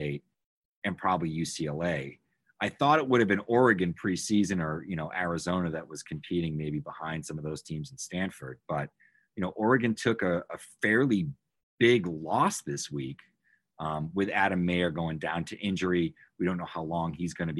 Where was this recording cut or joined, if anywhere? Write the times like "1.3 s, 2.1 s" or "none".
none